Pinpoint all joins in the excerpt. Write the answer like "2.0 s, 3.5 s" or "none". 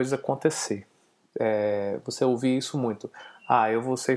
none